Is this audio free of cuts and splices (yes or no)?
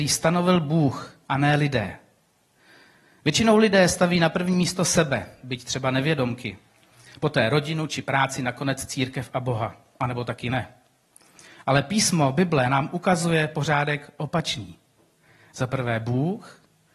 yes